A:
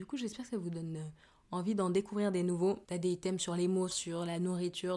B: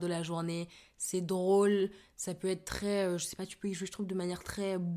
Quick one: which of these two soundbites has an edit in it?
A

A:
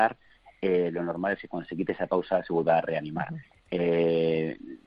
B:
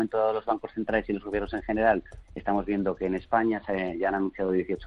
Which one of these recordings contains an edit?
B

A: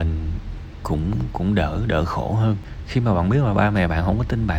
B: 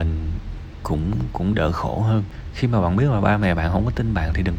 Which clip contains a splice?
B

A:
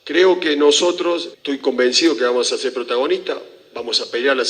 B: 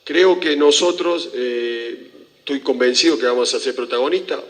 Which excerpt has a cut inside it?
A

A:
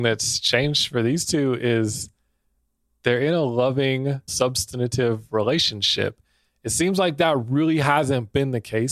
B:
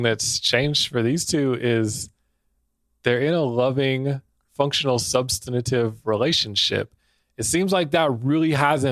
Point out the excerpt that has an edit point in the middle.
A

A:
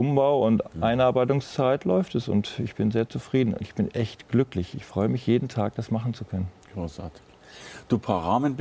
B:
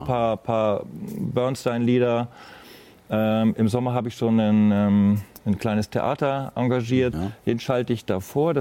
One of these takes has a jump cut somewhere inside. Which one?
B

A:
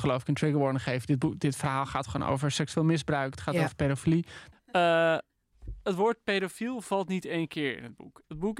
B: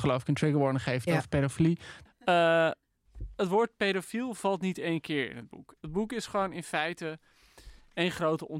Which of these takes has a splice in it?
B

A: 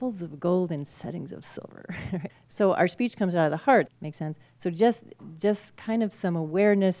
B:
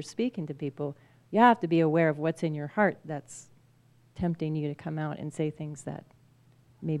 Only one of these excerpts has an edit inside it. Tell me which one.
A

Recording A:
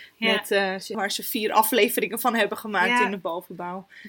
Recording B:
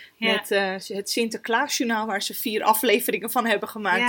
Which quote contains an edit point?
A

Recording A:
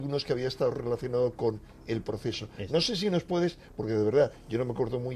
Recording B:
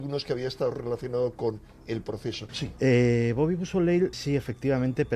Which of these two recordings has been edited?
B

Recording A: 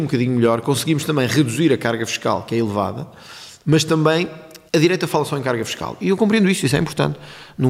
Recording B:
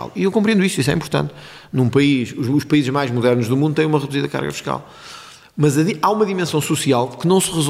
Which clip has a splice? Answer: A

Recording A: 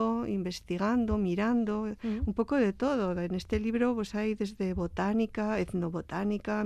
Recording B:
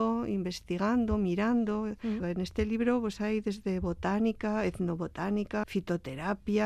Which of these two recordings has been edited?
B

